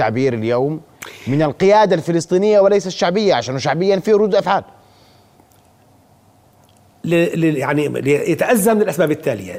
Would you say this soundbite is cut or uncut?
uncut